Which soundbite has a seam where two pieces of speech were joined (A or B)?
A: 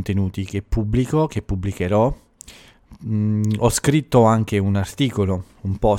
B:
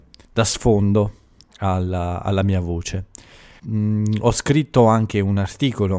B